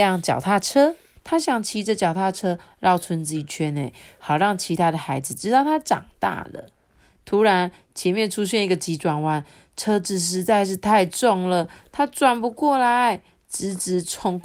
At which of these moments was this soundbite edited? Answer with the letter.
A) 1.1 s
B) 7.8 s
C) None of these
A